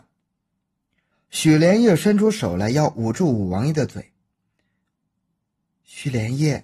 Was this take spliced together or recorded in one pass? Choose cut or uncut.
cut